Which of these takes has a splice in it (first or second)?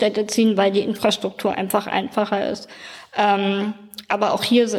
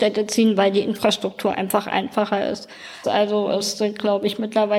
second